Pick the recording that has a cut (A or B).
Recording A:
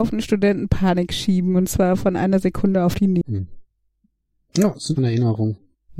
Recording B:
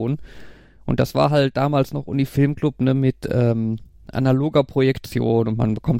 A